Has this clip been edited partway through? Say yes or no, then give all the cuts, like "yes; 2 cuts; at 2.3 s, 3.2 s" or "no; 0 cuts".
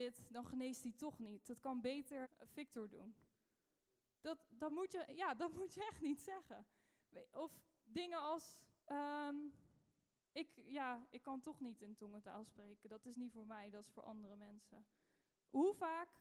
yes; 2 cuts; at 2.2 s, 8.8 s